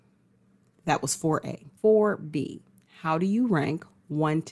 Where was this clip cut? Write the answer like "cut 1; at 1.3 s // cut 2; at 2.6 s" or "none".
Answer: cut 1; at 1.8 s